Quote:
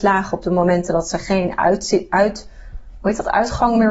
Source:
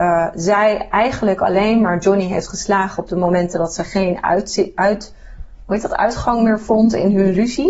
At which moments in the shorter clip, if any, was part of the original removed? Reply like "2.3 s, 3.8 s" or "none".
none